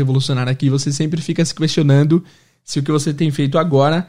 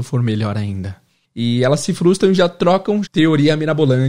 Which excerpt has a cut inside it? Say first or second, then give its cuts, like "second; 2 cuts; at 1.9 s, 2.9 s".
second; 2 cuts; at 1.2 s, 3.0 s